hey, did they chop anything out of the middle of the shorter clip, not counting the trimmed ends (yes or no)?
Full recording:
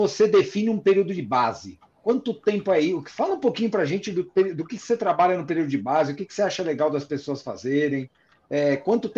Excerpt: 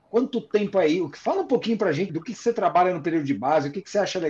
yes